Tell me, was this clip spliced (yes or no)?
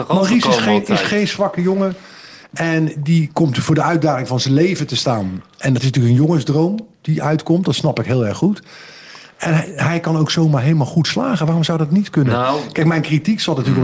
no